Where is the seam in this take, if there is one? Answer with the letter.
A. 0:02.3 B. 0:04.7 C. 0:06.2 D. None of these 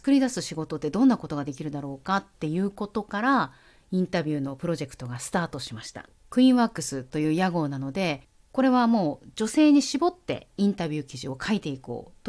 C